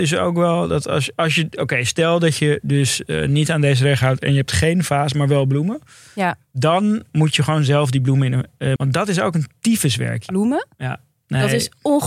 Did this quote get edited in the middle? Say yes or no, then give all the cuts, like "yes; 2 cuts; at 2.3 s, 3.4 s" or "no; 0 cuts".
yes; 2 cuts; at 8.8 s, 10.3 s